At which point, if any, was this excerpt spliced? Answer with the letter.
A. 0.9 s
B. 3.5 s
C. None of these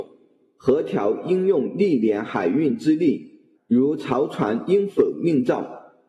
B